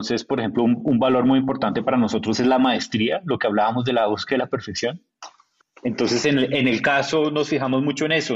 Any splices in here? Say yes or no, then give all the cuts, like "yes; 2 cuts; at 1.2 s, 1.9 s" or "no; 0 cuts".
no; 0 cuts